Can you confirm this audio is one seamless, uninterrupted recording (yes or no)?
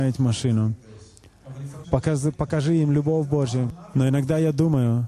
no